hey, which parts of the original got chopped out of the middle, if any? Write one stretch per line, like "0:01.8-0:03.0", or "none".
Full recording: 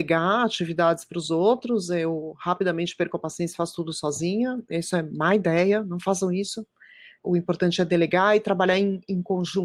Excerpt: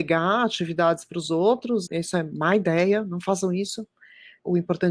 0:01.9-0:04.7